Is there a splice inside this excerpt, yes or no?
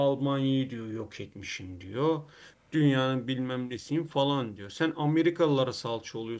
no